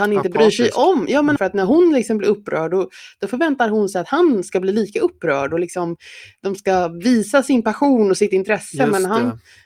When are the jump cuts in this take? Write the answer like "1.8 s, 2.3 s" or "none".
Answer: 1.4 s